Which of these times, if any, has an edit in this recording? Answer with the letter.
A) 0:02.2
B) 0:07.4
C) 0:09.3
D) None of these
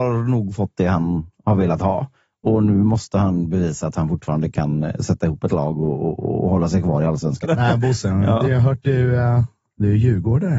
B